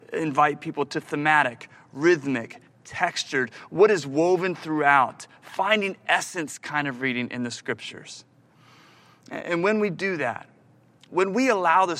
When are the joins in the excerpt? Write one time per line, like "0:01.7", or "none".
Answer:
none